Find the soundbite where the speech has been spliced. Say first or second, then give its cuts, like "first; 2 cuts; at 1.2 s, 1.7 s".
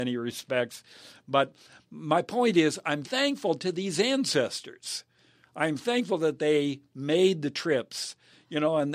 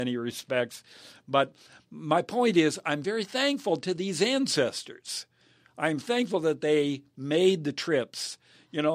first; 1 cut; at 3.0 s